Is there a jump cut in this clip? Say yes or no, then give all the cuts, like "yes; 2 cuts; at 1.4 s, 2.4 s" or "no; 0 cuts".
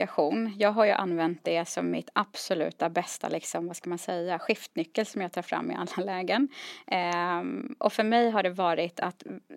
no; 0 cuts